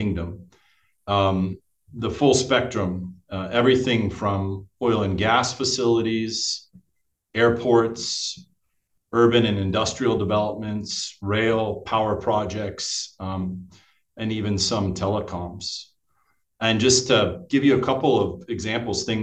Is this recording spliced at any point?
no; 0 cuts

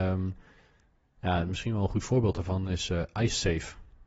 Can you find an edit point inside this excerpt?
no; 0 cuts

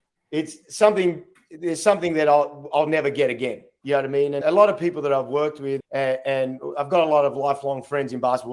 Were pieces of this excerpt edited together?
yes; 2 cuts; at 4.4 s, 5.8 s

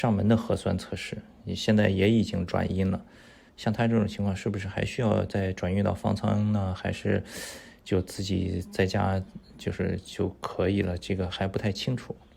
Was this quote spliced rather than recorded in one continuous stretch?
no; 0 cuts

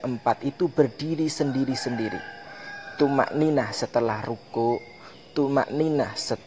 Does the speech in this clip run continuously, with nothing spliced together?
yes; 0 cuts

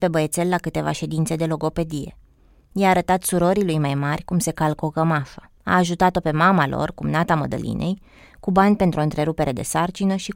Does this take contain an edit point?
no; 0 cuts

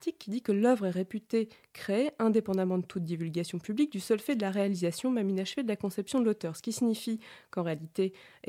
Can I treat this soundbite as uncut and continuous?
yes; 0 cuts

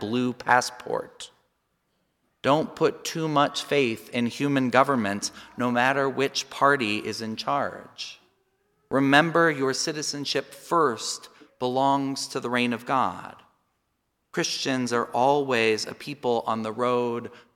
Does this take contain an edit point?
no; 0 cuts

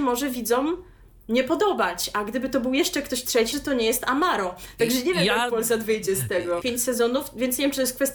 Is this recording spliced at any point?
yes; 2 cuts; at 3.5 s, 6.6 s

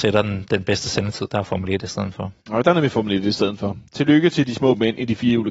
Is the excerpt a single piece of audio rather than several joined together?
no; 1 cut; at 2.4 s

